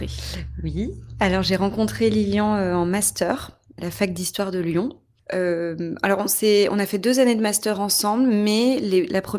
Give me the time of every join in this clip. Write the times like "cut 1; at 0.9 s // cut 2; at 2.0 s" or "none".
cut 1; at 3.8 s

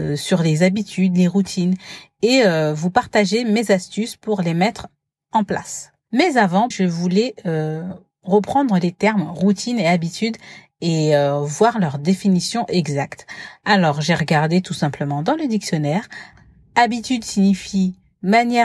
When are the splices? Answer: cut 1; at 6.7 s

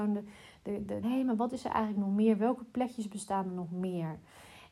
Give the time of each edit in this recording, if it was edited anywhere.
cut 1; at 1.0 s

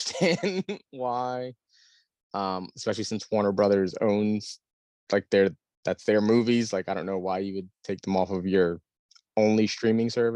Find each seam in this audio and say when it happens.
none

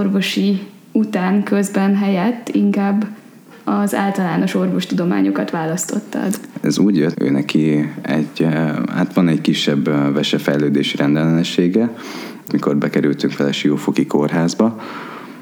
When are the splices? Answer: cut 1; at 7.1 s // cut 2; at 12.5 s

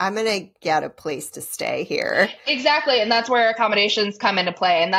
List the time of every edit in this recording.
none

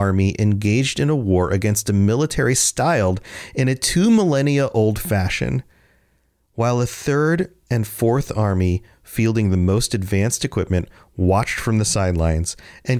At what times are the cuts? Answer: none

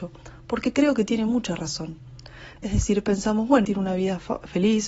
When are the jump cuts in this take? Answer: cut 1; at 2.6 s // cut 2; at 3.6 s

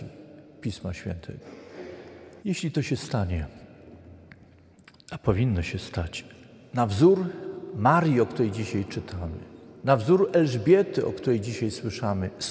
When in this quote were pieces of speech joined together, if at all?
cut 1; at 2.4 s

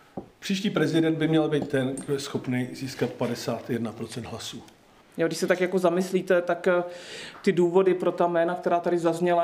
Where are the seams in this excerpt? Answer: cut 1; at 5.0 s

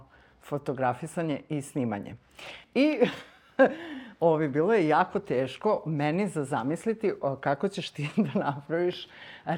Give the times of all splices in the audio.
cut 1; at 2.6 s

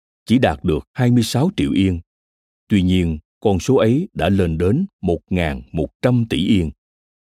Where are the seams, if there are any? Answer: cut 1; at 3.3 s

